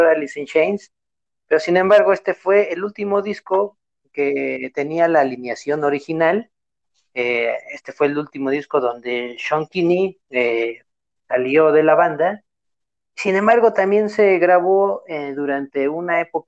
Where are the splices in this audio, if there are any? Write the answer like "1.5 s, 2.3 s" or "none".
none